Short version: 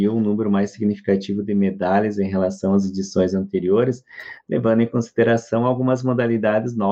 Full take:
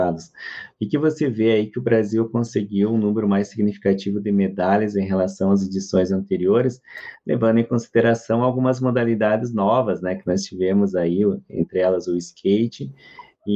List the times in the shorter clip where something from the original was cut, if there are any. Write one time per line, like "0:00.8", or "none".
none

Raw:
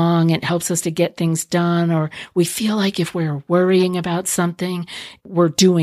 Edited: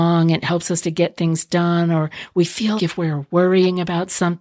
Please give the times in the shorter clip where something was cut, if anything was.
0:02.8

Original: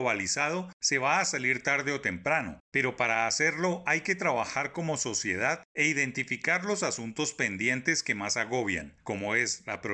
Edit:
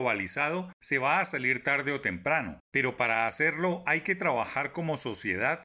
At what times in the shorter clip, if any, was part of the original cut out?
none

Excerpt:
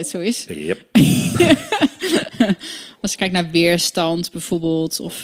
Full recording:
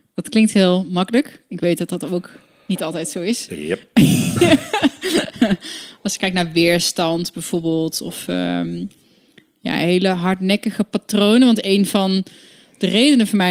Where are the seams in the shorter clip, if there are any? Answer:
none

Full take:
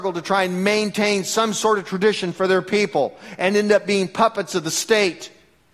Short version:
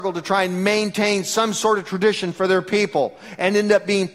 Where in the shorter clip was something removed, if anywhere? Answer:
none

